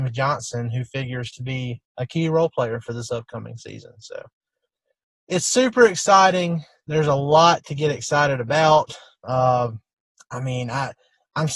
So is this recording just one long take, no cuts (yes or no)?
no